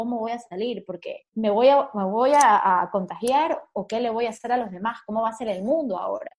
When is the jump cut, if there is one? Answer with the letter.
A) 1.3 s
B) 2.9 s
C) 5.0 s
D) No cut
A